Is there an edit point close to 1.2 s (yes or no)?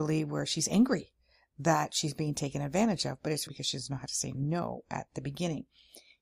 no